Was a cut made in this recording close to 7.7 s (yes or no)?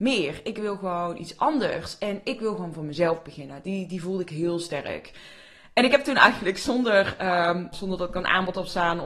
yes